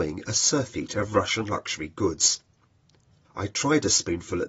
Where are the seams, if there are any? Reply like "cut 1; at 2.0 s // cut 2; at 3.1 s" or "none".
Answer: cut 1; at 3.2 s